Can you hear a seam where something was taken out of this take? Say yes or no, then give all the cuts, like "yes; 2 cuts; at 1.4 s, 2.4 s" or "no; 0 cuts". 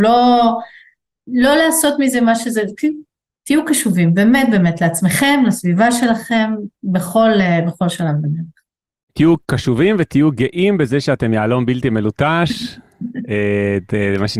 yes; 1 cut; at 9.1 s